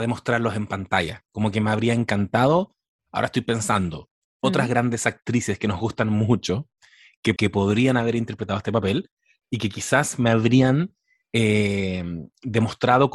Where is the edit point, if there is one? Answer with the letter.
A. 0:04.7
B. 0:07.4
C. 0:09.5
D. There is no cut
B